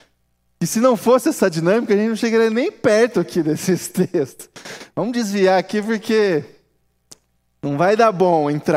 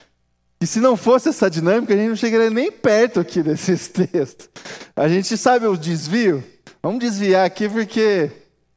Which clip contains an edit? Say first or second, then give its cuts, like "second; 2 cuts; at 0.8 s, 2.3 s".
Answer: first; 1 cut; at 4.9 s